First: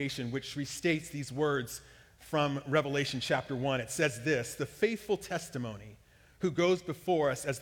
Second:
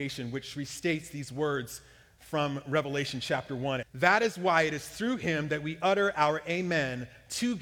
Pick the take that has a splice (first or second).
second